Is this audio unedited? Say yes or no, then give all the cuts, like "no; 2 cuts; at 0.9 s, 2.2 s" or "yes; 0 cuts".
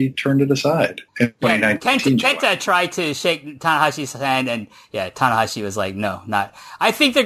no; 1 cut; at 1.1 s